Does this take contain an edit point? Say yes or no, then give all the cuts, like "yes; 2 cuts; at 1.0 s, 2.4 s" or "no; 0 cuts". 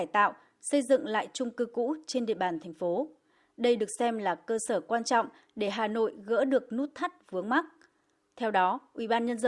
no; 0 cuts